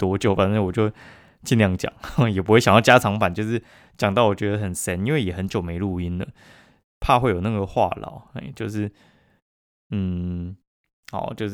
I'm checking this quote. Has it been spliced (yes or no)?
no